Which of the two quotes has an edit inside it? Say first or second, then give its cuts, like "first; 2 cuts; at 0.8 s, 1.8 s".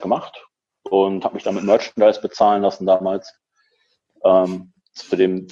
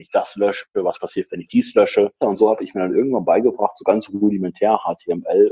second; 1 cut; at 2.2 s